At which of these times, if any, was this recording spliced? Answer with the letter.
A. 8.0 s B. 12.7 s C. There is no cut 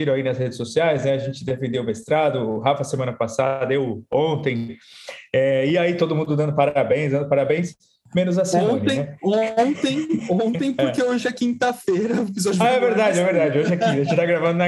C